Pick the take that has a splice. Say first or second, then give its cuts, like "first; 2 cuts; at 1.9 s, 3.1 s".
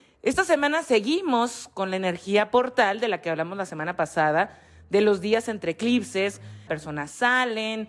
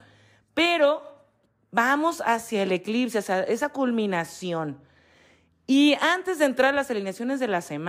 first; 1 cut; at 6.7 s